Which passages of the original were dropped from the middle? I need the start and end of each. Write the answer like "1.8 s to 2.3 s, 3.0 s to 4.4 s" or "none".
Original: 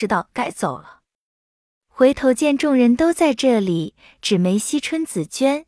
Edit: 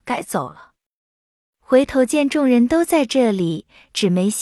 none